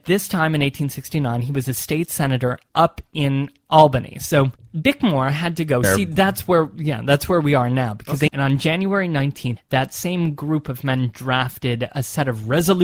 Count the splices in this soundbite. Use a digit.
3